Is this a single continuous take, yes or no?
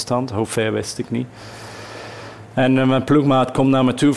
yes